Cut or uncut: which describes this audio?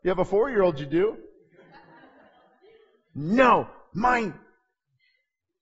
uncut